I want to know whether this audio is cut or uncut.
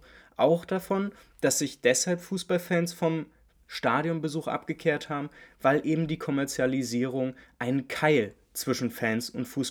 uncut